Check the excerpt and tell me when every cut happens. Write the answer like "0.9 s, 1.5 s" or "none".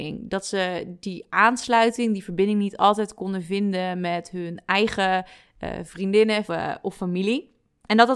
6.5 s